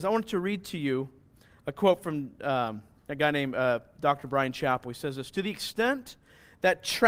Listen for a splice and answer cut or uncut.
uncut